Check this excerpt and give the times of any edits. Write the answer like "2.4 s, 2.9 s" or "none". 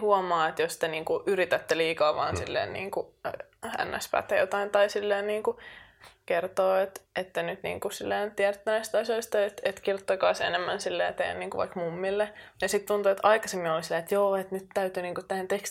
7.1 s